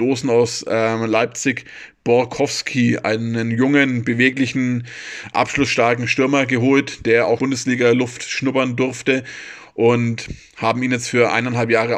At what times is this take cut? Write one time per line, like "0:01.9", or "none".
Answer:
0:07.4